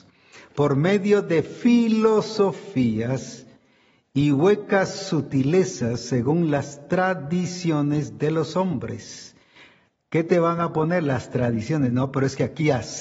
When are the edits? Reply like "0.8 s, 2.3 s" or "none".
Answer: none